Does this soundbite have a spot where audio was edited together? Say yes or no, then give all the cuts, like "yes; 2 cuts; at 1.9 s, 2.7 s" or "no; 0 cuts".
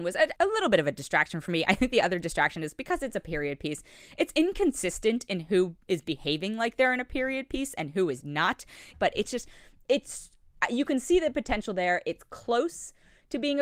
yes; 1 cut; at 8.9 s